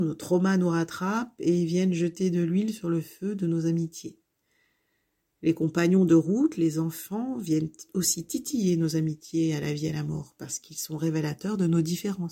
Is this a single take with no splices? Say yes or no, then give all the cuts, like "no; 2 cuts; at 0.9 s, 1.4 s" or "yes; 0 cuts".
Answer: yes; 0 cuts